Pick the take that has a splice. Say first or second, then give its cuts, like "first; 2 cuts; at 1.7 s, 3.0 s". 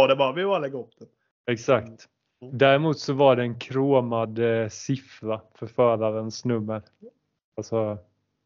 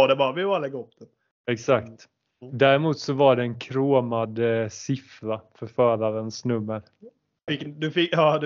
second; 1 cut; at 7.5 s